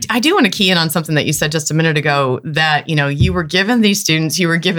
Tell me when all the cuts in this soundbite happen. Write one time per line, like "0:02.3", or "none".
none